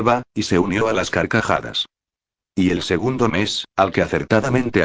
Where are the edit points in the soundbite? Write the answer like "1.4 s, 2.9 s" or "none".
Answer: 2.4 s